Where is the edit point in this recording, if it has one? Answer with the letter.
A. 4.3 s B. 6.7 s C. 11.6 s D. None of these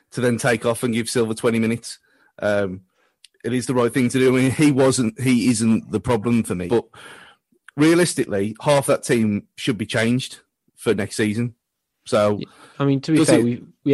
B